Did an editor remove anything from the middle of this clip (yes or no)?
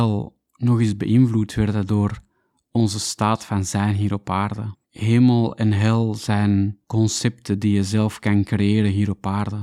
yes